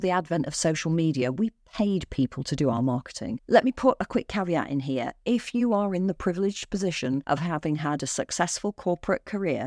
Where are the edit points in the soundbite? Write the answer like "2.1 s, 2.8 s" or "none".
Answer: 3.4 s